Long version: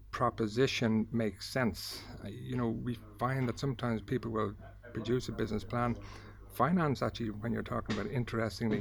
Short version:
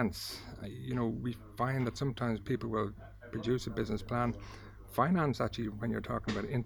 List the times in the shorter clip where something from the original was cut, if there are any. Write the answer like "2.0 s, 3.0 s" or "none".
none